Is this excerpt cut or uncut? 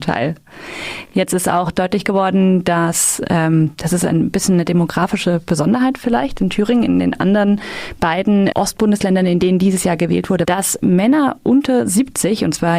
cut